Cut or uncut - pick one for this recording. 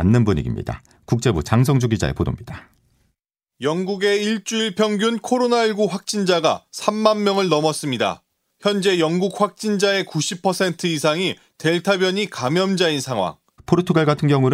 cut